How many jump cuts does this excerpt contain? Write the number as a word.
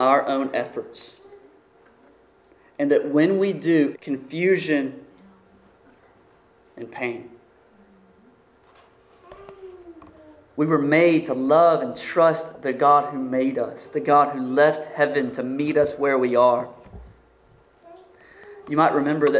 one